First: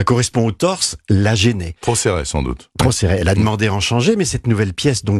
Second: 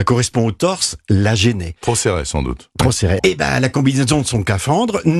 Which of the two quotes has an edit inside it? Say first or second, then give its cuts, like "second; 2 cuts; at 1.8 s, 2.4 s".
second; 1 cut; at 3.2 s